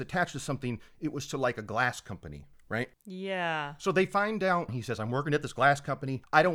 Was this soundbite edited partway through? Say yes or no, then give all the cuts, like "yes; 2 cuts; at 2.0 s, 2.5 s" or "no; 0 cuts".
yes; 1 cut; at 4.7 s